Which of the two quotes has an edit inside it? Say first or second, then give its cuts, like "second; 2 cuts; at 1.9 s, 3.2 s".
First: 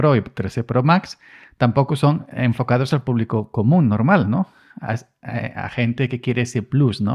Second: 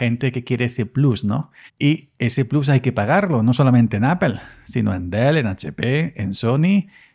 second; 1 cut; at 1.7 s